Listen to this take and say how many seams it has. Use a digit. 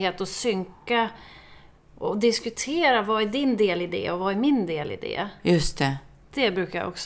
0